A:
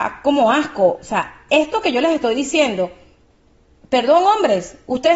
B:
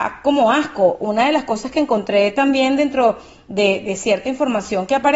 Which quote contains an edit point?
A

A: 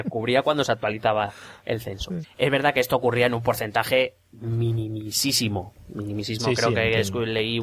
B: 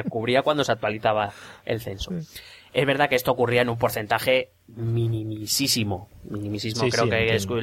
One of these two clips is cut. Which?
A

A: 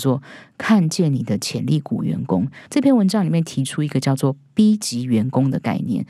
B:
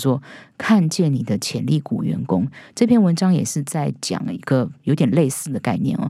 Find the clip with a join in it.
A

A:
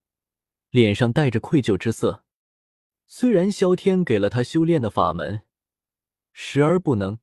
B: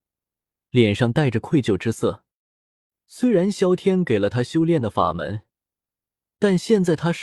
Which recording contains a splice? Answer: A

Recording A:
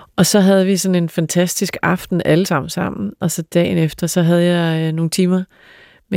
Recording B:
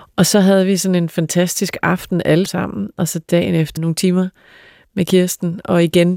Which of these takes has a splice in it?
B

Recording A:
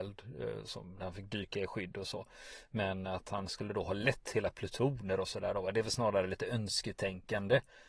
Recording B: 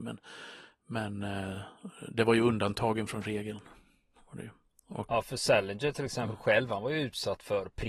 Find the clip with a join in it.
B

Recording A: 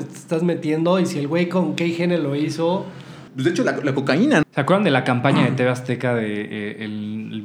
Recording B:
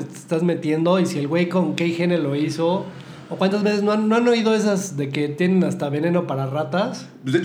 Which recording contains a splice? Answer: A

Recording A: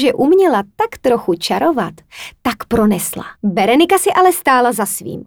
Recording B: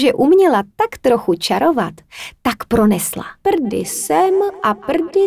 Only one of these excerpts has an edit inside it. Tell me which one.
A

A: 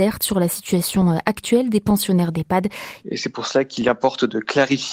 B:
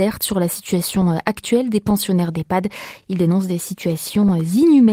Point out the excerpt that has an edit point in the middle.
A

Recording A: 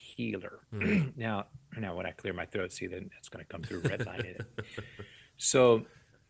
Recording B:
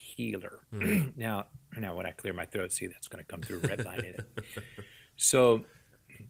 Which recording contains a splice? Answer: B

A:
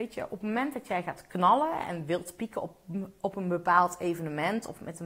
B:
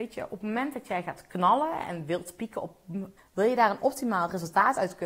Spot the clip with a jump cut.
B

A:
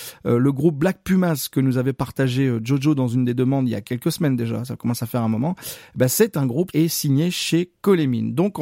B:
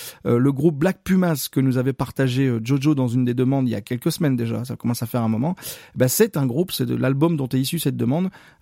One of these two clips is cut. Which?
A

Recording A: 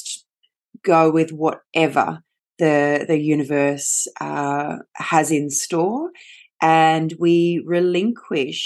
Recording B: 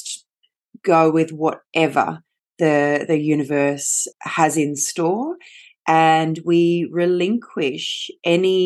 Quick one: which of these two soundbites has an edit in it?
B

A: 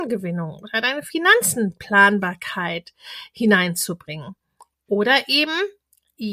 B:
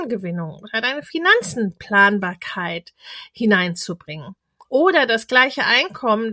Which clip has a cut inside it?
B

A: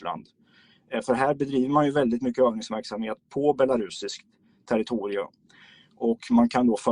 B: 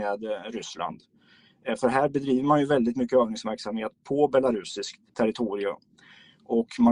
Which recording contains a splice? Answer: B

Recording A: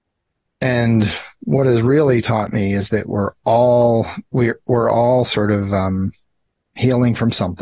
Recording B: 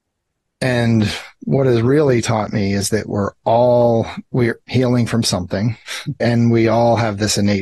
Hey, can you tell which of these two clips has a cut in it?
B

